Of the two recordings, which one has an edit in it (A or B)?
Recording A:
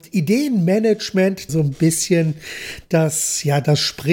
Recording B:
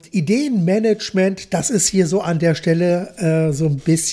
A